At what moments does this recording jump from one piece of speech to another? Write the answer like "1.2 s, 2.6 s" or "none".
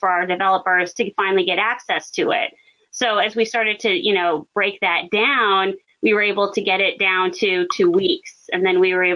none

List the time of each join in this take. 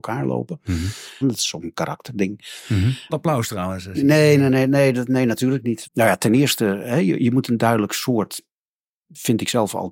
1.2 s, 3.1 s, 5.8 s

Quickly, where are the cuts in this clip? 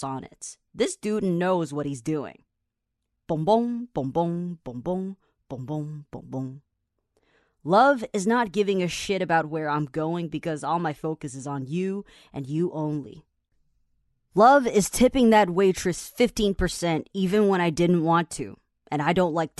none

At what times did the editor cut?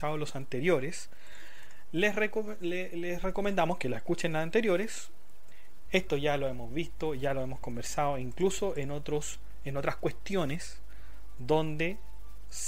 5.9 s

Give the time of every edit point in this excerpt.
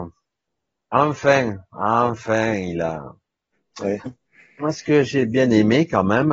4.1 s

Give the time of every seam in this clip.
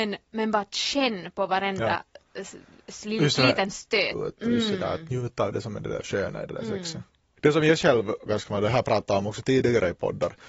4.1 s, 8.3 s

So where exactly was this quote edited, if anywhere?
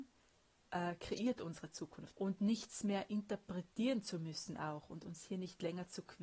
2.1 s

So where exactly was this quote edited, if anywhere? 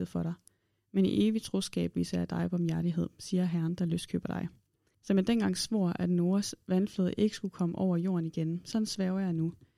4.9 s

